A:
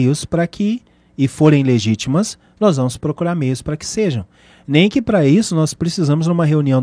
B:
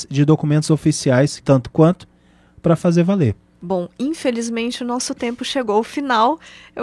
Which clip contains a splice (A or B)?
B